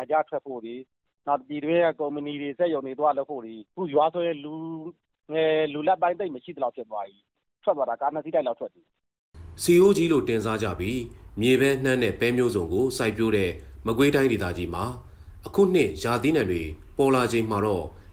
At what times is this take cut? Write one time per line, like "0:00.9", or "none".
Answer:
0:03.7